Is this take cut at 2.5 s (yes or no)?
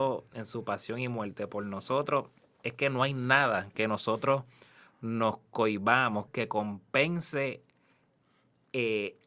no